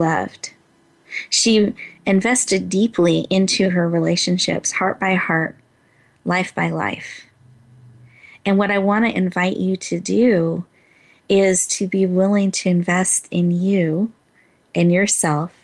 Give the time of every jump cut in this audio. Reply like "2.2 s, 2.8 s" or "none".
none